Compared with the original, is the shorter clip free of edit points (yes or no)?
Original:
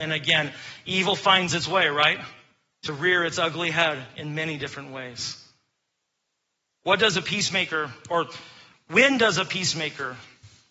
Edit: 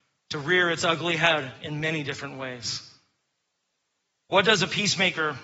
yes